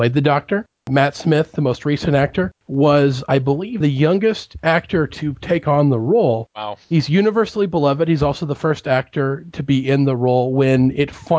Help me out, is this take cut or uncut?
cut